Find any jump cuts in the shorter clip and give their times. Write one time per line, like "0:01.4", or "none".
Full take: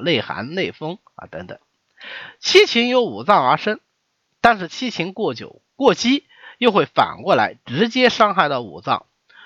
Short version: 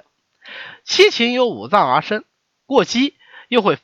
0:02.6